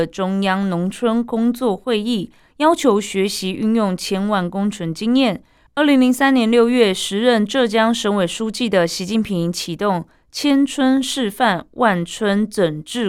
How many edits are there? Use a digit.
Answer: 1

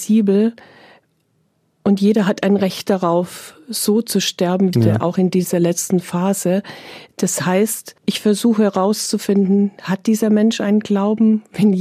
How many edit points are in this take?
2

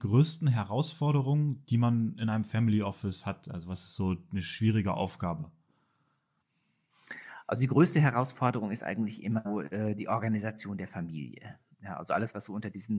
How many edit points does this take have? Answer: 1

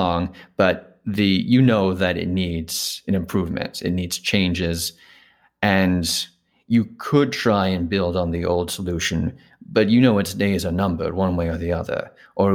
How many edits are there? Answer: 0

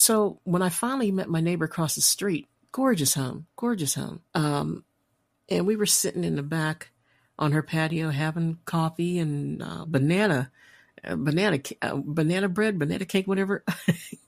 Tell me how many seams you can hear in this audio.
2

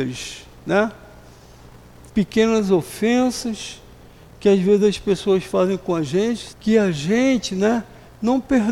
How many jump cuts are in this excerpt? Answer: 2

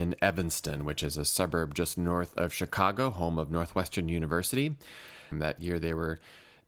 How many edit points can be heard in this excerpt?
1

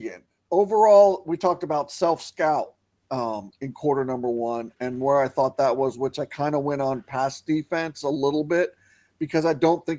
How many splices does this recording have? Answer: 0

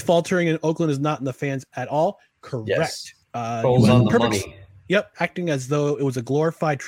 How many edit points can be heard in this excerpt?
2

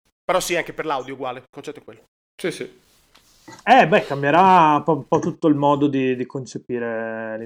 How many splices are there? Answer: 0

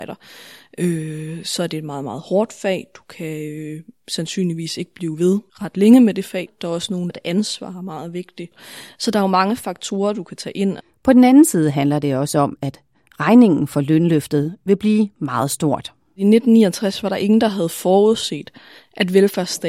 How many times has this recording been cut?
1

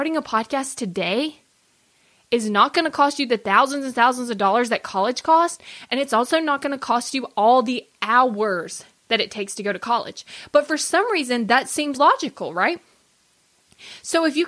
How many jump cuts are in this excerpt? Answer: 1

